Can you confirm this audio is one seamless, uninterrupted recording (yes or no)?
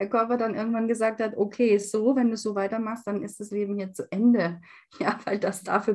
yes